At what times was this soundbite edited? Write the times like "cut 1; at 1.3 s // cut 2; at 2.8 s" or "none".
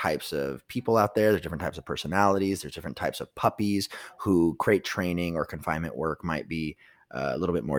none